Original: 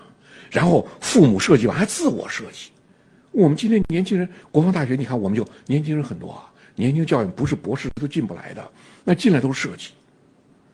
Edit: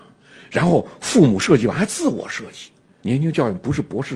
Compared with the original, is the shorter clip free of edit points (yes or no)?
no